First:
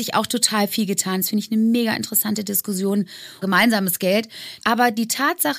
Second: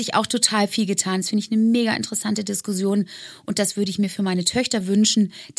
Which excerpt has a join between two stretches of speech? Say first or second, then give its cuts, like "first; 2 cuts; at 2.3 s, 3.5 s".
first; 2 cuts; at 3.4 s, 4.6 s